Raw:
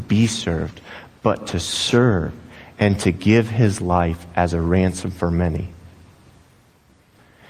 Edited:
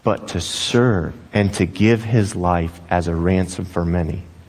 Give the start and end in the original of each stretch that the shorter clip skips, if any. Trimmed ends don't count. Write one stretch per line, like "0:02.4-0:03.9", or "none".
0:02.4-0:02.7